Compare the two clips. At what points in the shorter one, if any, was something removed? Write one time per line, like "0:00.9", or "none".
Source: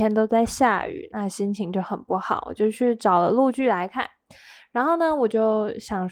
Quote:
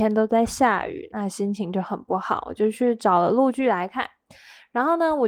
none